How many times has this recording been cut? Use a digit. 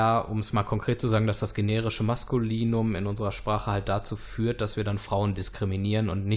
0